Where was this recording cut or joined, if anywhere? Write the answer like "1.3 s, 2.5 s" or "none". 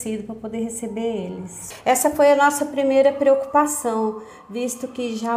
none

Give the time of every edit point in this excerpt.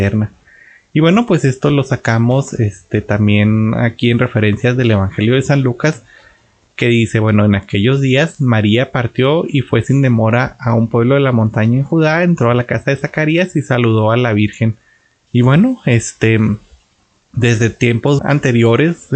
15.3 s, 18.2 s

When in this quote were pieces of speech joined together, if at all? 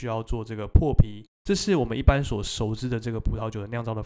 1.3 s

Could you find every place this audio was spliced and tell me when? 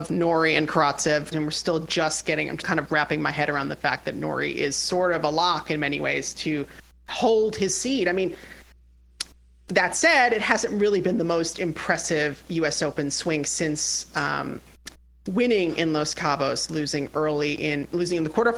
1.3 s, 2.6 s

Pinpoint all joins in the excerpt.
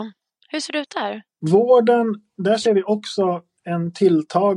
1.3 s

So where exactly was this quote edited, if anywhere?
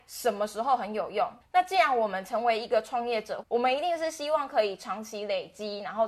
1.4 s, 3.4 s

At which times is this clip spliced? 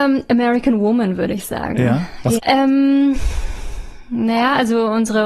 2.4 s

